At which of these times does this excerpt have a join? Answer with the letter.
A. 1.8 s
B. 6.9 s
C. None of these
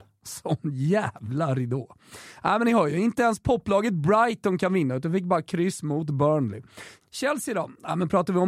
C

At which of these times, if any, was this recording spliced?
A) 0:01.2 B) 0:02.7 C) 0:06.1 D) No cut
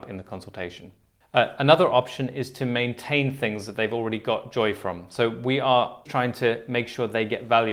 C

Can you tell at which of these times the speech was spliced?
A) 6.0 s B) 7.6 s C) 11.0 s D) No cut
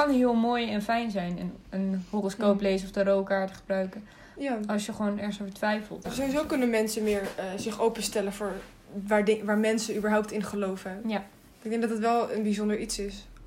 A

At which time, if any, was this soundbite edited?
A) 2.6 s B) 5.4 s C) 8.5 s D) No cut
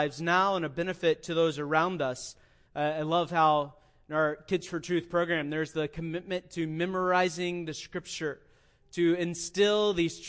A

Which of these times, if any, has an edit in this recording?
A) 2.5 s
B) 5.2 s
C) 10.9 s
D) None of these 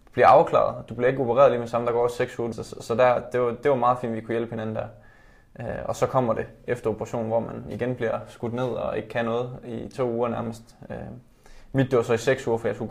A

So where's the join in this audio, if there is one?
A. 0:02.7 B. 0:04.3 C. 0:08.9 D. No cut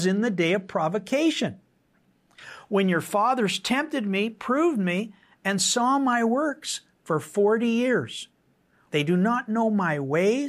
C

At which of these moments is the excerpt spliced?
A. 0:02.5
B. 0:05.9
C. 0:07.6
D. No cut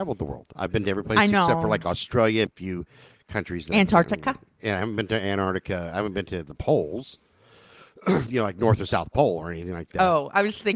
A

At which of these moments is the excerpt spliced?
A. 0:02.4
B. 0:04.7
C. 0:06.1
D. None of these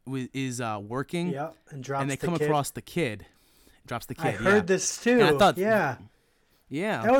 D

